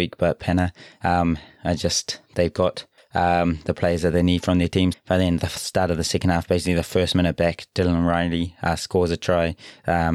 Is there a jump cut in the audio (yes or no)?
yes